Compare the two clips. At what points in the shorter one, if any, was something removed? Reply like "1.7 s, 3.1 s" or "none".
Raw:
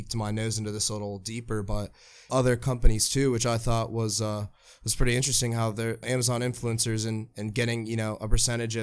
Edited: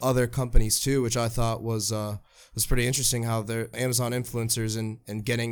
none